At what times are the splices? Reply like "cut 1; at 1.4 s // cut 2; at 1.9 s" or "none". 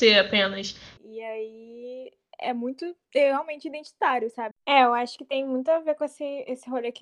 cut 1; at 1.0 s // cut 2; at 4.5 s